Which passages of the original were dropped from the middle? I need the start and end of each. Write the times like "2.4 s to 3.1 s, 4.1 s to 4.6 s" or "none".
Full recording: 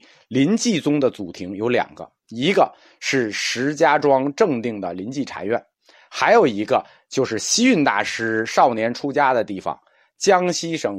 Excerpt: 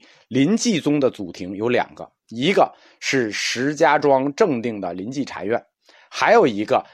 none